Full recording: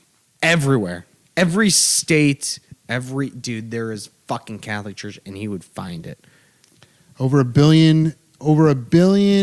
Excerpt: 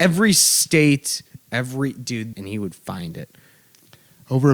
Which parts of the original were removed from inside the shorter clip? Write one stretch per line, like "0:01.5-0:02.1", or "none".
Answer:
0:03.7-0:05.2